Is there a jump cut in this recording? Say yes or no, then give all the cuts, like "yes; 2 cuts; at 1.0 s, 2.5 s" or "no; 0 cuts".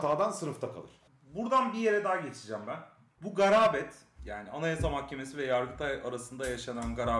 no; 0 cuts